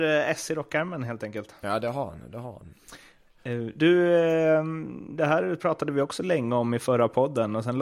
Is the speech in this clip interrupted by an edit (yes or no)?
no